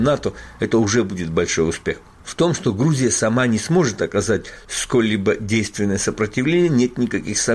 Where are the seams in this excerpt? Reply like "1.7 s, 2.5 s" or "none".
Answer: 2.1 s